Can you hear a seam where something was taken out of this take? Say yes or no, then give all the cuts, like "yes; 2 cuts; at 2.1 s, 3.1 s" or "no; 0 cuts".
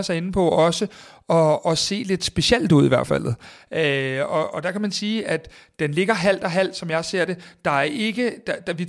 no; 0 cuts